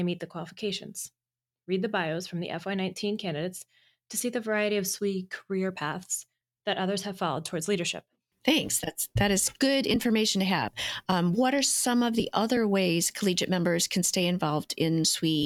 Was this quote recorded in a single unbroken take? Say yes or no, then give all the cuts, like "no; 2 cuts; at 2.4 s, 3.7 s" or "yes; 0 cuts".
yes; 0 cuts